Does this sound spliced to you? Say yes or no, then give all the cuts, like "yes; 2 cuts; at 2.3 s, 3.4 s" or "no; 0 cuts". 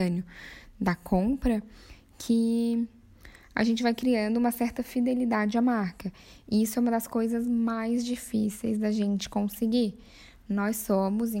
no; 0 cuts